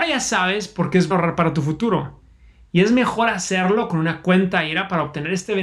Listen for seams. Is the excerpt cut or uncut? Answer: cut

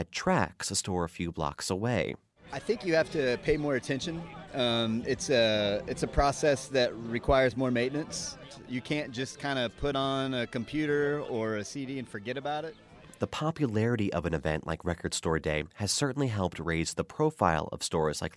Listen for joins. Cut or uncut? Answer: uncut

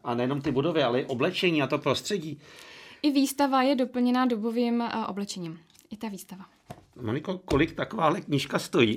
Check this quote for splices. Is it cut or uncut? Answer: uncut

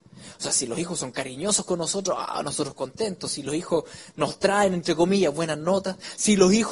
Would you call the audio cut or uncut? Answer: uncut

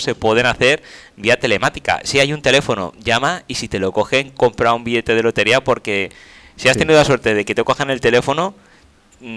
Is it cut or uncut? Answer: uncut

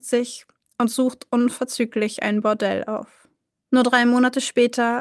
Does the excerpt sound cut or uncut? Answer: cut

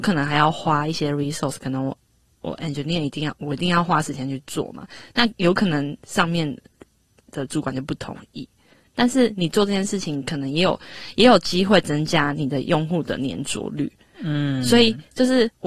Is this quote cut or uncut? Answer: uncut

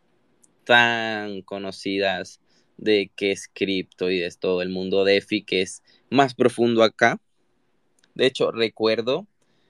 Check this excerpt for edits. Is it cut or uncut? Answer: cut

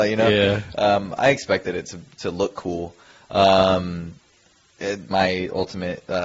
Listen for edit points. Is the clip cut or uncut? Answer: cut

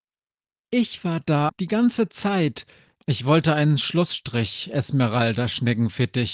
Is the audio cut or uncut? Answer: cut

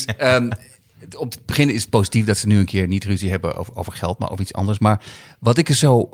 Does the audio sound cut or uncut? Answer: uncut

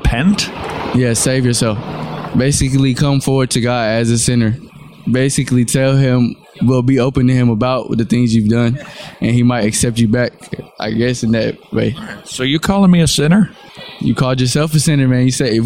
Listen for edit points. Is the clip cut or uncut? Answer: cut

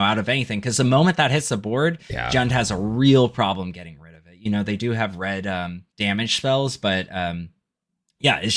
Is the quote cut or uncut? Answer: cut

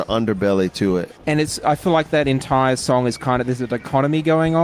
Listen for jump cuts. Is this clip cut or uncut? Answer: cut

